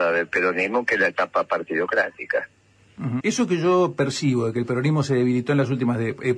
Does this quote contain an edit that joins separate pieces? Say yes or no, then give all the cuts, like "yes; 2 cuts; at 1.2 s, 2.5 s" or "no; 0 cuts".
yes; 1 cut; at 3.2 s